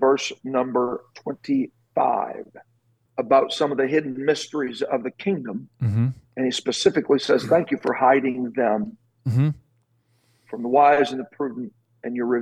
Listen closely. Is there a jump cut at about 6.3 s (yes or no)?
no